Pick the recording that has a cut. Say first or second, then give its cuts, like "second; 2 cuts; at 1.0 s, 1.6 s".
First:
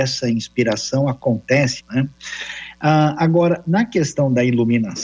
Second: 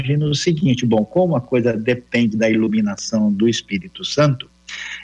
first; 1 cut; at 1.8 s